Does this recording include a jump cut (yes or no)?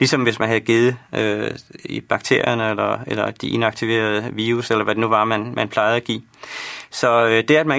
no